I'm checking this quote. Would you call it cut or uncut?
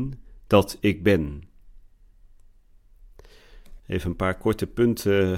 cut